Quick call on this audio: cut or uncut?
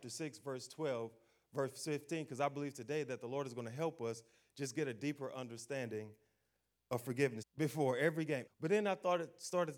cut